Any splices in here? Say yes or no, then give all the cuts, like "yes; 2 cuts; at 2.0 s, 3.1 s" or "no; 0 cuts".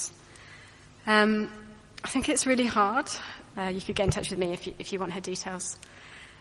yes; 1 cut; at 3.5 s